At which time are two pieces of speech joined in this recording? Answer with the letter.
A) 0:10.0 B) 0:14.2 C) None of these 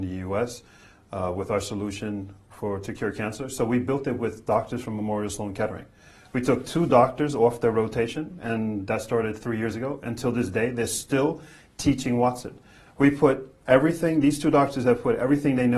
C